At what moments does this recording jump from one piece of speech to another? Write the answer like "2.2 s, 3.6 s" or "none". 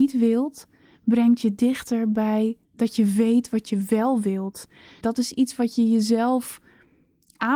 2.6 s, 5.0 s